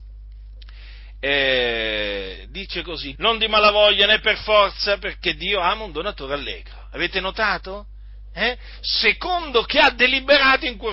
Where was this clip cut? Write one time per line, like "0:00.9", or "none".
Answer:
0:03.2